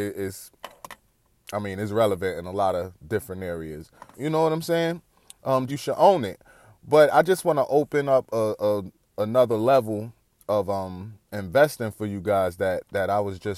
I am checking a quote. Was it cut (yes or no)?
yes